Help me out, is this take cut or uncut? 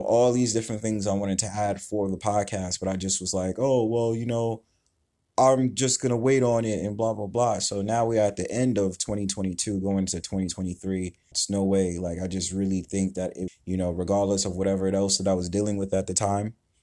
cut